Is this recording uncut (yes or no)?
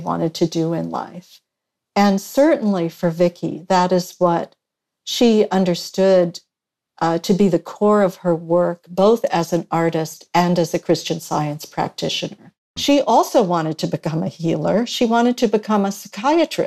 no